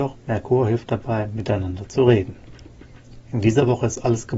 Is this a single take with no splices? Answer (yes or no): no